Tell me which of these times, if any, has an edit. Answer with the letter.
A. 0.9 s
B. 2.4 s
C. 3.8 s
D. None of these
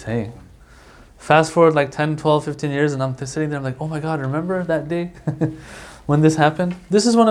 D